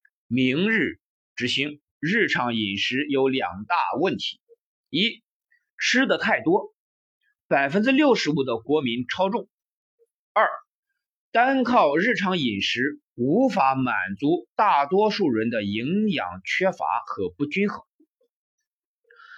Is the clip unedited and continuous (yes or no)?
no